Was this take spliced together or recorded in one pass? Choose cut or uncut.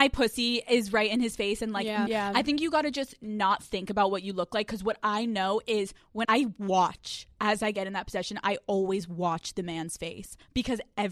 cut